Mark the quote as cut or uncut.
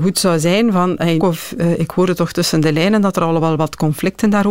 cut